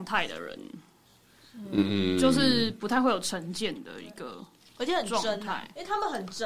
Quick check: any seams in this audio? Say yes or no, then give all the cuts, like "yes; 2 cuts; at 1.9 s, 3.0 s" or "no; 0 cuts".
no; 0 cuts